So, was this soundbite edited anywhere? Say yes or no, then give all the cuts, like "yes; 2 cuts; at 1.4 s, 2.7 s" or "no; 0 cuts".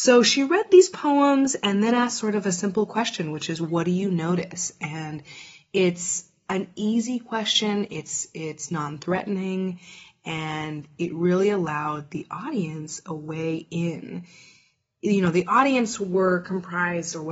no; 0 cuts